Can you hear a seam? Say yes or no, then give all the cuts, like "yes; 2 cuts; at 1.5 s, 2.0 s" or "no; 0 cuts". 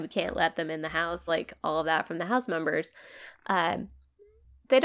no; 0 cuts